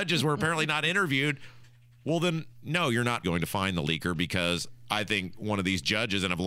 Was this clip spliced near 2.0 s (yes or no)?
no